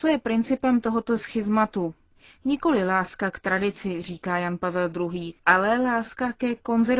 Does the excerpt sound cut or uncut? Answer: cut